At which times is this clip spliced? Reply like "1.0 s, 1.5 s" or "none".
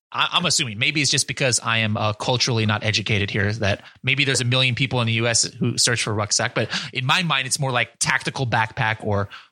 none